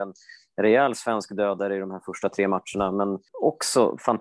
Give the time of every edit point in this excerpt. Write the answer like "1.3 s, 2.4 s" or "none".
3.3 s